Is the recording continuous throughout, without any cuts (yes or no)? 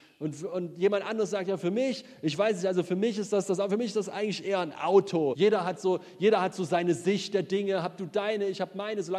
no